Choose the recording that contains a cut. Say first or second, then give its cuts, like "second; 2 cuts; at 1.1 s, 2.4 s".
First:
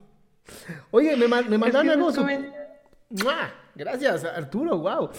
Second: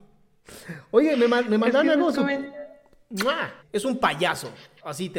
second; 1 cut; at 3.6 s